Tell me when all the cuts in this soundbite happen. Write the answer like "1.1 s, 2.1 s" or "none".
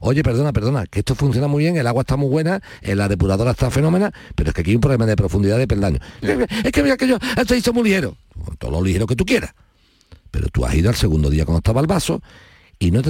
6.2 s